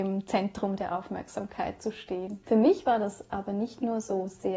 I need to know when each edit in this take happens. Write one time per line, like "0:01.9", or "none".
0:02.4